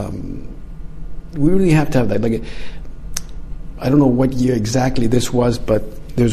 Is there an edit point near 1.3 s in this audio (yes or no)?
yes